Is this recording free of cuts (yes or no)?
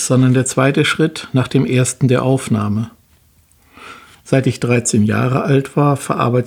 yes